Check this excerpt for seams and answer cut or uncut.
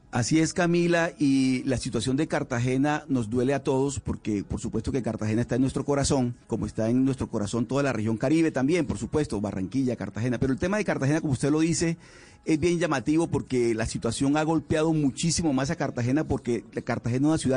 cut